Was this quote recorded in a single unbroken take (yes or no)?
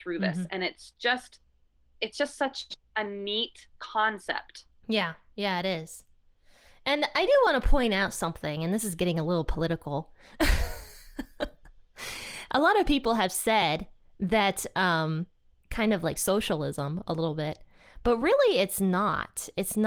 no